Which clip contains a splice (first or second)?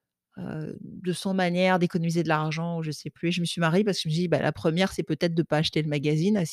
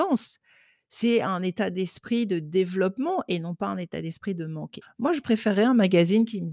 second